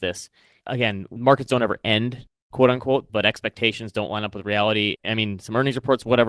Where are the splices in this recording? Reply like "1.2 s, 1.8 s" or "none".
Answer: 3.1 s, 5.0 s